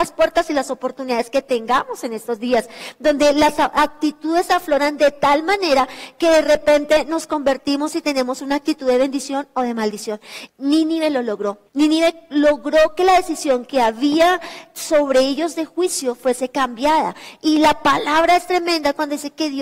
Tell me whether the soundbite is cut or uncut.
cut